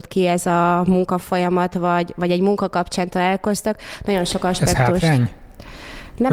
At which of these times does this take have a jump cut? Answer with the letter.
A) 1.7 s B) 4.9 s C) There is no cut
C